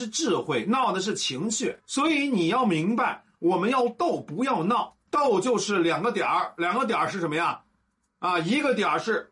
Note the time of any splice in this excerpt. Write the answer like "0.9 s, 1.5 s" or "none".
none